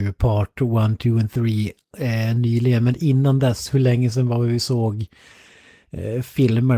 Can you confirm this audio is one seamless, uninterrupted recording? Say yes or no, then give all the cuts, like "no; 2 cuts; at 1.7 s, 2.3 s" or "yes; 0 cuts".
yes; 0 cuts